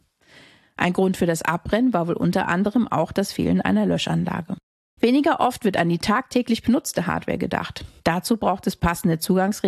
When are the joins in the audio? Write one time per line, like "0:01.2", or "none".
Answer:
0:05.0
0:08.0